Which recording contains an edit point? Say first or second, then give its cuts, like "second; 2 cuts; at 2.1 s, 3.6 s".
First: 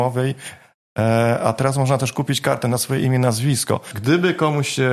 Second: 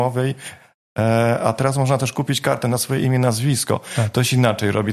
first; 1 cut; at 3.9 s